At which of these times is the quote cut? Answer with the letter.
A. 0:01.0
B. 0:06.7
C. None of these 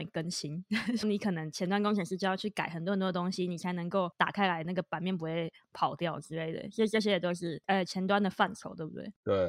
A